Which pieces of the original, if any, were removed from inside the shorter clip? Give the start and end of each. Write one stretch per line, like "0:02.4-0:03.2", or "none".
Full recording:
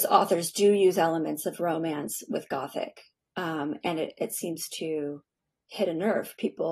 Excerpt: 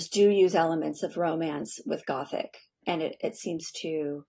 0:03.3-0:03.8